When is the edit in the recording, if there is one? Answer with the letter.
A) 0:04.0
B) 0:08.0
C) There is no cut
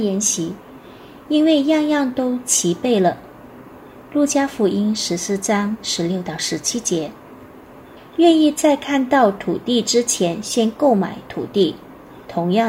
B